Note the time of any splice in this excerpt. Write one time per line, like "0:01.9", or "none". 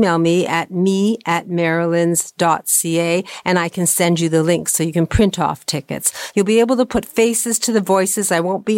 0:06.3